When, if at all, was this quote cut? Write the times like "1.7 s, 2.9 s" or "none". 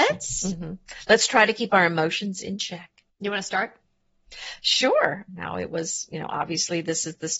3.1 s, 5.3 s